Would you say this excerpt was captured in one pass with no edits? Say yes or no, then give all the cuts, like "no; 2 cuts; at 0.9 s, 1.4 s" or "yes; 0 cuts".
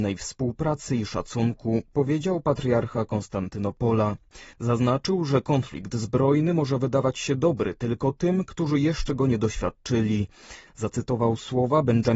no; 2 cuts; at 4.5 s, 10.7 s